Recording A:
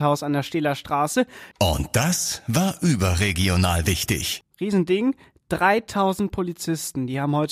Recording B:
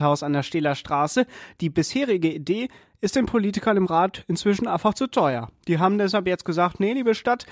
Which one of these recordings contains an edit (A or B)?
A